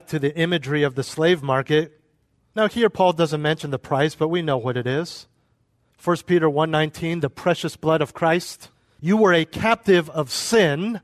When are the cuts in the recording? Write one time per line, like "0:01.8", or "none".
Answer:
0:02.4
0:09.0